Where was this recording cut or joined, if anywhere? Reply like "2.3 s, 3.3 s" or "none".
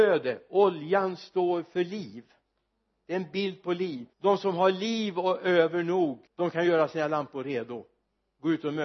4.1 s, 6.3 s